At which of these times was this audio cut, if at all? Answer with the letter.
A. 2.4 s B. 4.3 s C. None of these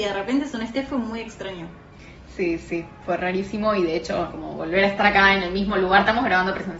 B